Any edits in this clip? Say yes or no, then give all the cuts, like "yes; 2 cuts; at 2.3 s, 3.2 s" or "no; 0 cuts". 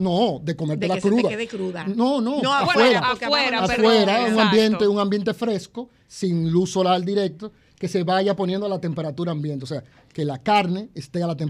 yes; 1 cut; at 1.8 s